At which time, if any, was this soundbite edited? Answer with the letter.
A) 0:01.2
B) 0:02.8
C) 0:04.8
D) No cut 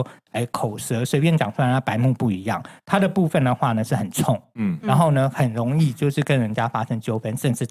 D